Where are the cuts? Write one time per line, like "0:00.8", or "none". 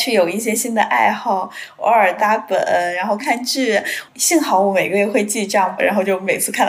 0:02.2
0:03.2
0:05.8